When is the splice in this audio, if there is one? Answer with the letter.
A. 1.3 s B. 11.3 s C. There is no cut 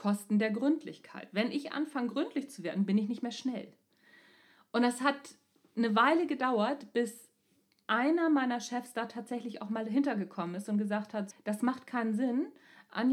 B